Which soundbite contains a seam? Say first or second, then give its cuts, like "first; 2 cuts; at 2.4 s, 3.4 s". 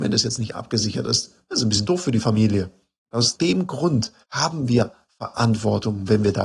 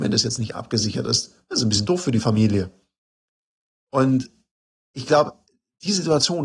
first; 2 cuts; at 3.0 s, 4.2 s